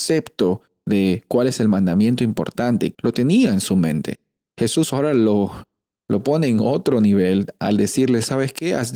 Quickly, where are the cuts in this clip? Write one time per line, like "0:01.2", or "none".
0:02.9